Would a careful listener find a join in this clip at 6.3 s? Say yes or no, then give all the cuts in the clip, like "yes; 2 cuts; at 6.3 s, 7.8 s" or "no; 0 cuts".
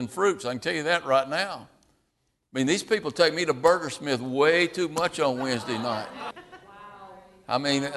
yes; 1 cut; at 6.3 s